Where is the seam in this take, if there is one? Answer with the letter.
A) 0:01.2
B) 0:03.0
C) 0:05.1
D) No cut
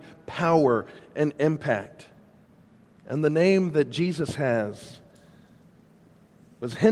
B